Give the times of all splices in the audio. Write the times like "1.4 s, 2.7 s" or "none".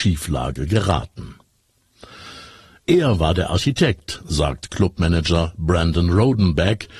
2.8 s